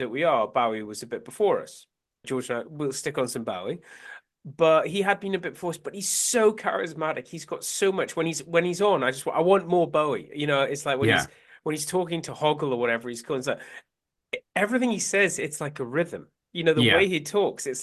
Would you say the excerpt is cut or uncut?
cut